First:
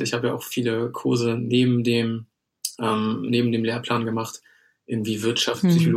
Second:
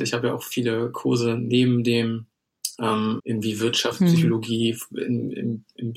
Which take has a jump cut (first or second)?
second